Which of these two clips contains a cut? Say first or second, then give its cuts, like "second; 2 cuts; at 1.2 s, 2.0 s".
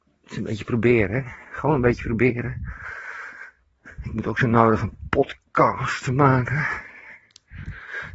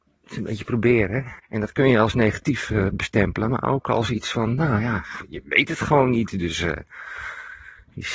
second; 1 cut; at 1.4 s